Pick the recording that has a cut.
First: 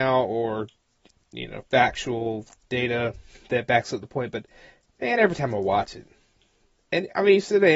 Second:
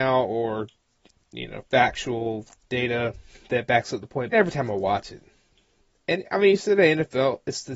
second; 1 cut; at 4.3 s

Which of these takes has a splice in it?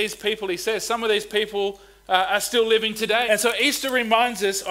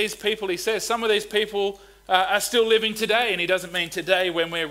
first; 1 cut; at 3.3 s

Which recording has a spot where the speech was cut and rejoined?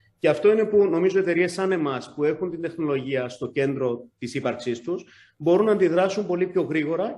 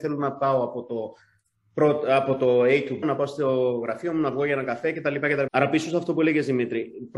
second; 2 cuts; at 3.0 s, 5.5 s

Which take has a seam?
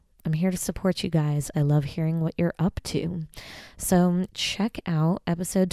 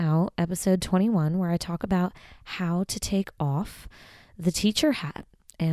first; 2 cuts; at 1.5 s, 4.3 s

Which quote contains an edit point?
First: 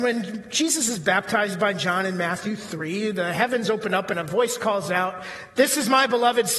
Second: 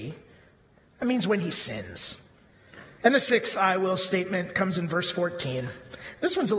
second; 1 cut; at 3.0 s

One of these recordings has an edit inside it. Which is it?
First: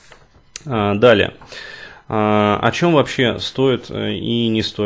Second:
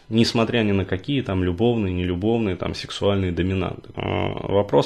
second; 1 cut; at 3.9 s

